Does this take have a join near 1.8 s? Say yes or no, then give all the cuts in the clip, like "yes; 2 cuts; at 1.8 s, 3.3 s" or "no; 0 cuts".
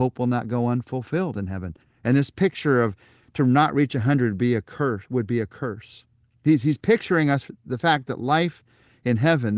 yes; 1 cut; at 1.8 s